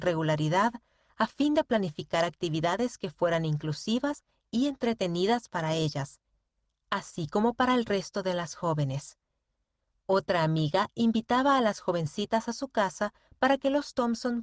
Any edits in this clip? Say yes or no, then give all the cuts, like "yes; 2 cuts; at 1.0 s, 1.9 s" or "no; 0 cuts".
no; 0 cuts